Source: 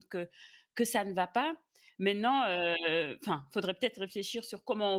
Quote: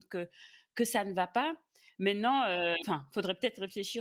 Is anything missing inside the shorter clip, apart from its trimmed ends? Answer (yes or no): yes